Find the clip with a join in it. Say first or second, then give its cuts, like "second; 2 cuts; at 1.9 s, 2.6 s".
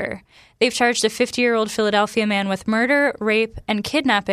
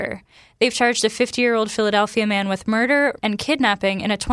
second; 1 cut; at 3.2 s